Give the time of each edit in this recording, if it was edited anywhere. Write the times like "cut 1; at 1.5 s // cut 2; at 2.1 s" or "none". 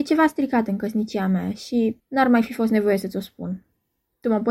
cut 1; at 2.0 s